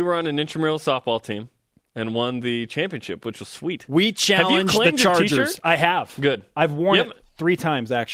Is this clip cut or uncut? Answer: uncut